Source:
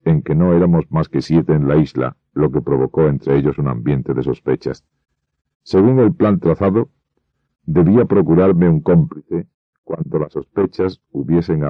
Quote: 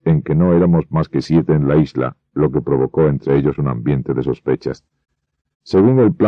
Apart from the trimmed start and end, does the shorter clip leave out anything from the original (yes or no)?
no